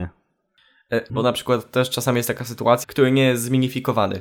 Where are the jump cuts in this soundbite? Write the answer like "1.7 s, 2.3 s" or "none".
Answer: 1.1 s, 2.8 s